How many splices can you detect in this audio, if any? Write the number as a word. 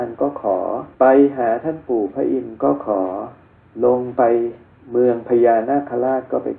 one